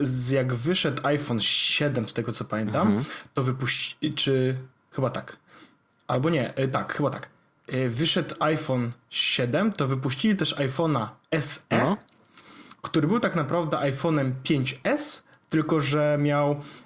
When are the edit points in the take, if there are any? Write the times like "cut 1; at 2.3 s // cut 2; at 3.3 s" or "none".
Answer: none